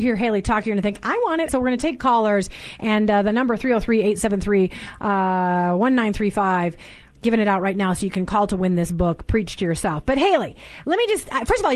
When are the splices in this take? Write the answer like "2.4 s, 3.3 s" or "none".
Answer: 1.5 s